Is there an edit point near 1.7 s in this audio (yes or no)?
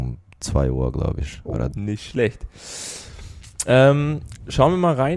yes